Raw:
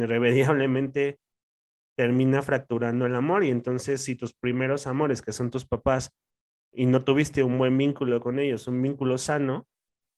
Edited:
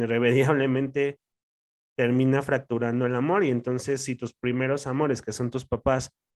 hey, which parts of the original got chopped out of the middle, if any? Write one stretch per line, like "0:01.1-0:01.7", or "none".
none

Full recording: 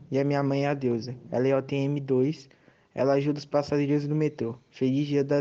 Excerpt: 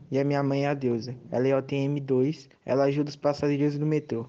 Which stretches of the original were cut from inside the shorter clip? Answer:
0:02.6-0:02.8

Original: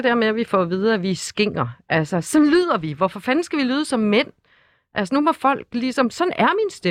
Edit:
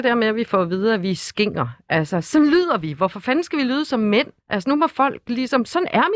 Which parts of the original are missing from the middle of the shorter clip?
0:04.4-0:04.8

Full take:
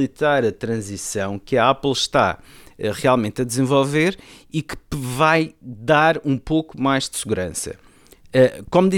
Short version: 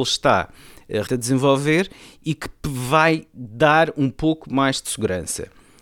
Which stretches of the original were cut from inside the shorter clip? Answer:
0:03.0-0:03.3

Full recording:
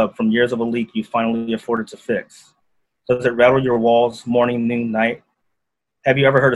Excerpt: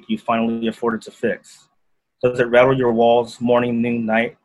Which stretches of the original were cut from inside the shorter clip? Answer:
none

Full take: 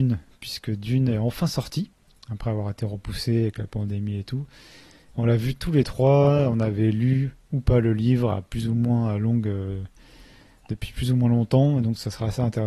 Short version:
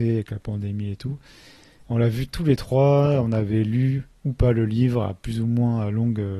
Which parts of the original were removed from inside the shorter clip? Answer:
none

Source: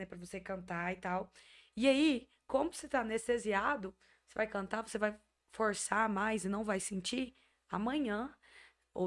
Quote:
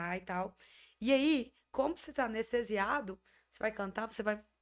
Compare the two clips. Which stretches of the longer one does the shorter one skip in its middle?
none

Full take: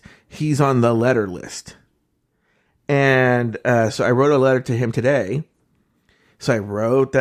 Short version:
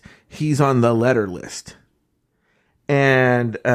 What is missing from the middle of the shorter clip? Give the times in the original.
none

